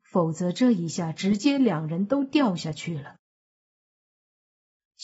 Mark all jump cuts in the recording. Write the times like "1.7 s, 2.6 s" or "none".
none